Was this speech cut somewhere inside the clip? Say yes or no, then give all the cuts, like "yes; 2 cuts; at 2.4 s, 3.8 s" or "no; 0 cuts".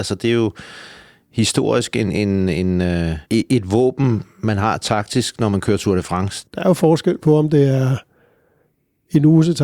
yes; 2 cuts; at 3.3 s, 6.5 s